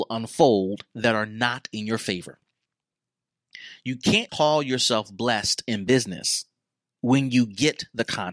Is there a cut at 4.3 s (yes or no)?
yes